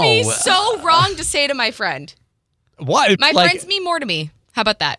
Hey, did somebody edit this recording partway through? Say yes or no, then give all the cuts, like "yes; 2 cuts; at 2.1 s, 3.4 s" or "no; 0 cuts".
yes; 1 cut; at 3.2 s